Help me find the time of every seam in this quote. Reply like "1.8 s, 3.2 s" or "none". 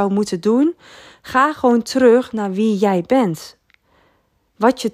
none